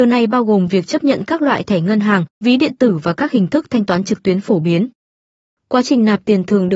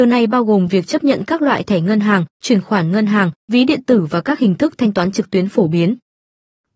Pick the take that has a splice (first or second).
first